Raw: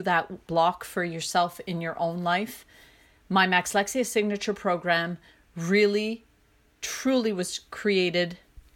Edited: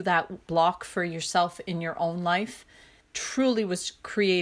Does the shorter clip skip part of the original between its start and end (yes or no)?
yes